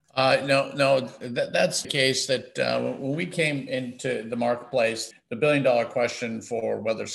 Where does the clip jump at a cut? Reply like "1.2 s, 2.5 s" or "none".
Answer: 1.8 s, 5.1 s

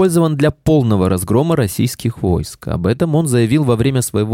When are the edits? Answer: none

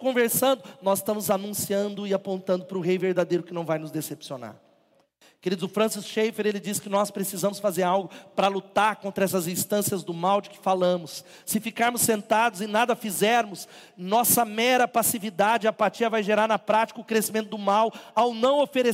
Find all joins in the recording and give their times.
none

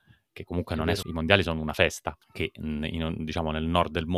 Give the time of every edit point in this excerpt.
1.0 s, 2.2 s

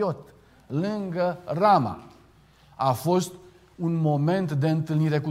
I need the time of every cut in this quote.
none

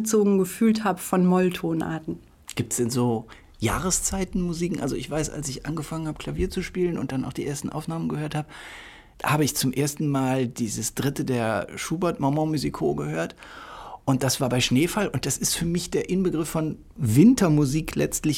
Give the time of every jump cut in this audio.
none

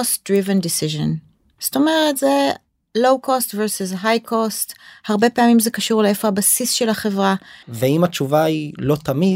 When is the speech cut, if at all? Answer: 7.6 s

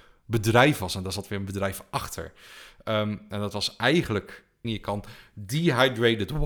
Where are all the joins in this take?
4.6 s

